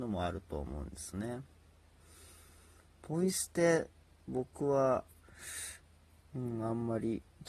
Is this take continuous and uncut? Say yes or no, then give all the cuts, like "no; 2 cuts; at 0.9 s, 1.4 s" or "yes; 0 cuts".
yes; 0 cuts